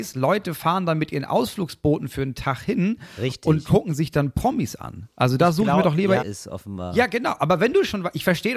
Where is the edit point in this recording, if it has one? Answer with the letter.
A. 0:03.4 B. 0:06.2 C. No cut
B